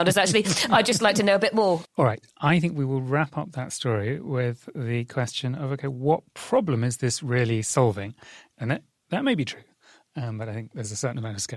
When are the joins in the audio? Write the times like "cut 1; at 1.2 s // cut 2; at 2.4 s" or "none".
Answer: cut 1; at 1.9 s // cut 2; at 8.5 s